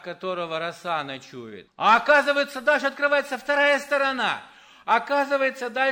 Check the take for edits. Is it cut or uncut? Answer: cut